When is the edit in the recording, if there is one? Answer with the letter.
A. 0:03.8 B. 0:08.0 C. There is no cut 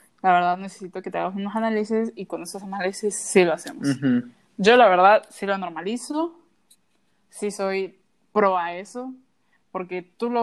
C